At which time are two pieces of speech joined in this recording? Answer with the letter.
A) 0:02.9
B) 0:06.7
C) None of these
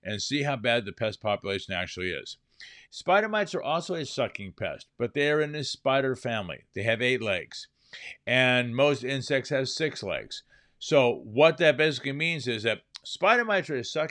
A